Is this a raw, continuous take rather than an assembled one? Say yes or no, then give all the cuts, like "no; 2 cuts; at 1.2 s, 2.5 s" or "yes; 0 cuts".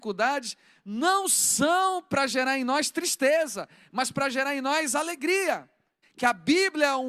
no; 1 cut; at 6.0 s